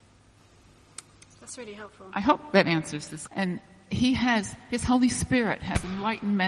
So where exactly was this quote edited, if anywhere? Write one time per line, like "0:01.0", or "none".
0:03.3